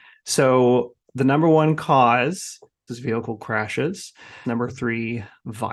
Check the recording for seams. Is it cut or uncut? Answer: cut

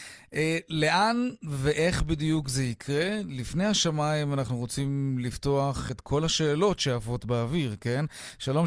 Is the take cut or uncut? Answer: uncut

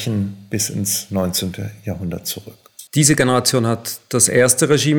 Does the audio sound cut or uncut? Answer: cut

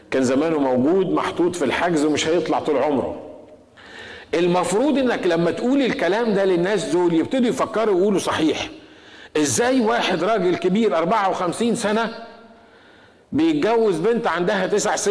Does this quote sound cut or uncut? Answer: uncut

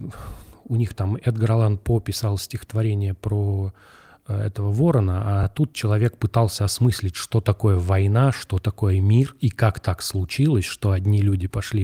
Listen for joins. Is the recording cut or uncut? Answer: uncut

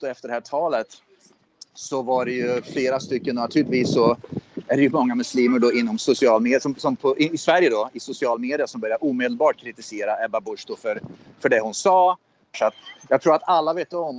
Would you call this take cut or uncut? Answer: cut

